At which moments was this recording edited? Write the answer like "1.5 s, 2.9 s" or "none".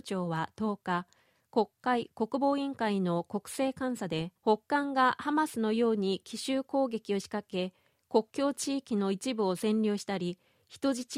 4.4 s